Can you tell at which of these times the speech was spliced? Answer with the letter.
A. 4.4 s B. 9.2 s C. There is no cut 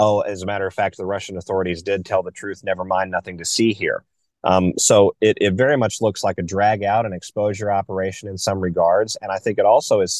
C